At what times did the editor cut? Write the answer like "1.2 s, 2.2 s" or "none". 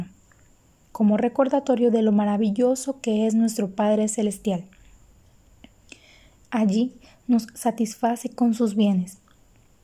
6.4 s